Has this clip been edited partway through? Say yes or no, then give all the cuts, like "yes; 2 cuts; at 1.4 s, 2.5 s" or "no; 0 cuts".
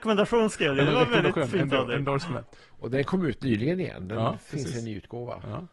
no; 0 cuts